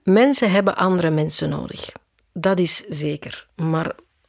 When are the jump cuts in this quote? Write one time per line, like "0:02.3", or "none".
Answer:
none